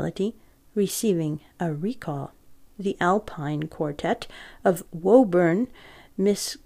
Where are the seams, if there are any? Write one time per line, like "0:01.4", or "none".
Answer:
0:02.7